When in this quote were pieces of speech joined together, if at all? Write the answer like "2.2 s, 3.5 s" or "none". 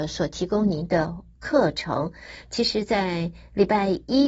none